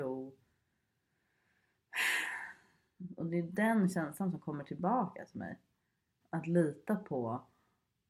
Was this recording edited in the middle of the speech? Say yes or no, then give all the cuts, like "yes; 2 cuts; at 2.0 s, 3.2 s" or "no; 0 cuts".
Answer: yes; 1 cut; at 6.2 s